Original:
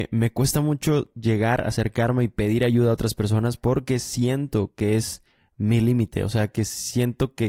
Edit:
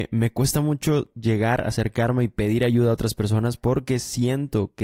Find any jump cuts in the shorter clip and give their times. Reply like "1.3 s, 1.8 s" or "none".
none